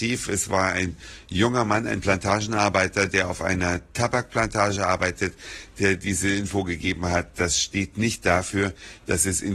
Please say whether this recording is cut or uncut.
uncut